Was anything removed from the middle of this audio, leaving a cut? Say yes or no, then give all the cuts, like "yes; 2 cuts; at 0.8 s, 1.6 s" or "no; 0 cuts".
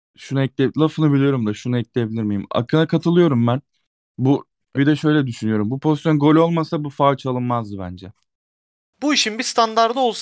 yes; 2 cuts; at 4.7 s, 8.8 s